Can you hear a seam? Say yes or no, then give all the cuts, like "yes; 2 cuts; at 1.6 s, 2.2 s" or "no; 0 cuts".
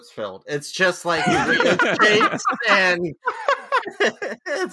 yes; 1 cut; at 3.8 s